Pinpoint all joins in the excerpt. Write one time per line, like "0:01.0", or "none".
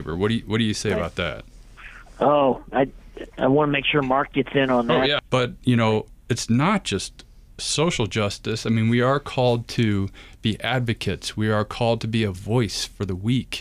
0:05.2